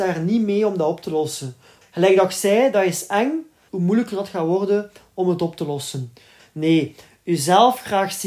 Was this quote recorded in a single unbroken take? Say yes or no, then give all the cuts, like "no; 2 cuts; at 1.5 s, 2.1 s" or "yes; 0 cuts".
no; 3 cuts; at 1.8 s, 3.7 s, 6.4 s